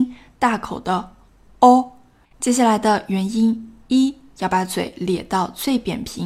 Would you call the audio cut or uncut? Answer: cut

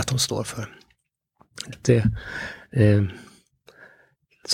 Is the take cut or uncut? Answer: cut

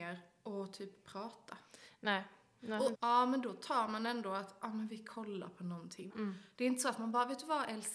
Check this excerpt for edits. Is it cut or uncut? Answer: cut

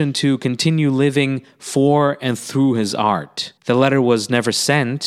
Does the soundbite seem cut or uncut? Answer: cut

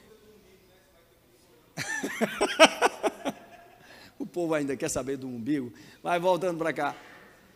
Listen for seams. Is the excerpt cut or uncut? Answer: uncut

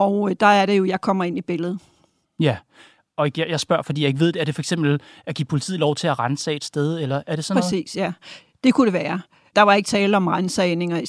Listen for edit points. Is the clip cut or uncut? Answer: cut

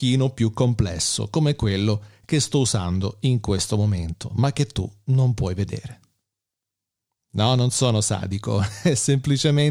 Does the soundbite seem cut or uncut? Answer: uncut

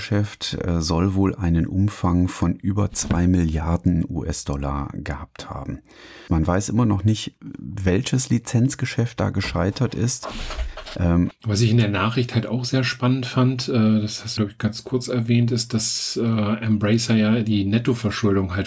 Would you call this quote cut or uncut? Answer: cut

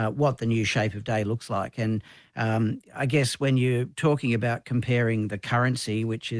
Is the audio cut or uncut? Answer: uncut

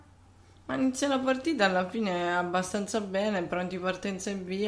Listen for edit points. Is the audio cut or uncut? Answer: uncut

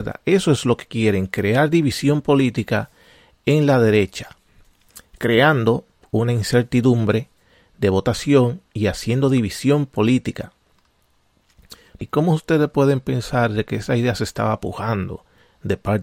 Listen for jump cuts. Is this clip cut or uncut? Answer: cut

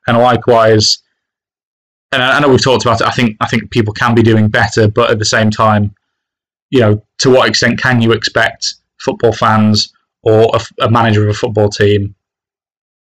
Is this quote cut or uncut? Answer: uncut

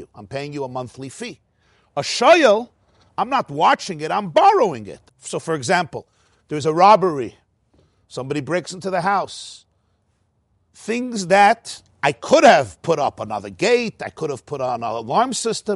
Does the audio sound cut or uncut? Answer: cut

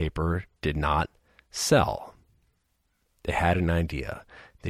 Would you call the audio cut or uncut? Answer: cut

